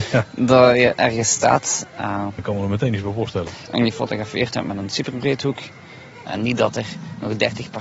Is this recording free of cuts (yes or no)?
no